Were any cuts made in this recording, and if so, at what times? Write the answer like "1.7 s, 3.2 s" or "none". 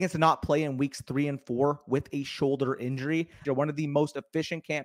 3.4 s